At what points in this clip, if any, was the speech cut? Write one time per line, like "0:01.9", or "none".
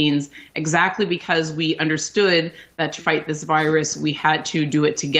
0:03.0

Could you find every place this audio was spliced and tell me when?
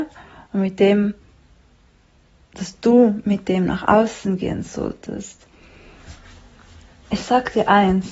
none

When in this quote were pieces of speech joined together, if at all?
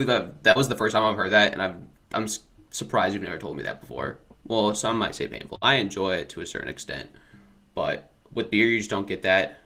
0:04.3

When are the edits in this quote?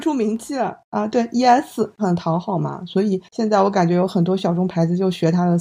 0:02.0

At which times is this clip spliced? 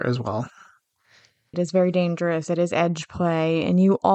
0:01.5

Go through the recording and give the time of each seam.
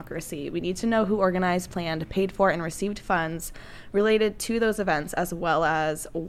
none

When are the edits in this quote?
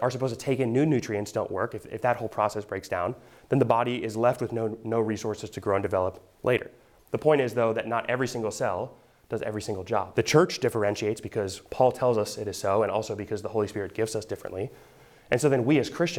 0:10.1
0:11.7

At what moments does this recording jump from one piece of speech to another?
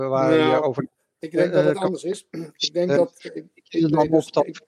none

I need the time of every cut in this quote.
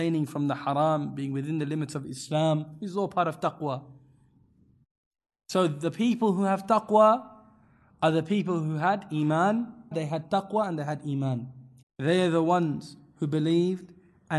0:09.9
0:11.8

